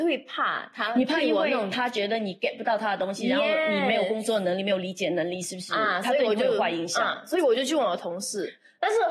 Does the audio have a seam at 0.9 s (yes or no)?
no